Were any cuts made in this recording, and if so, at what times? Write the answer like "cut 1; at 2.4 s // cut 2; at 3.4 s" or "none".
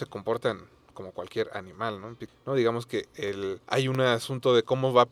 cut 1; at 2.3 s // cut 2; at 3.6 s